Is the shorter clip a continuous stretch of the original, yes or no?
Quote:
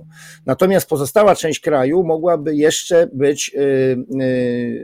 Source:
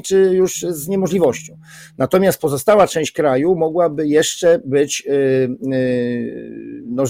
yes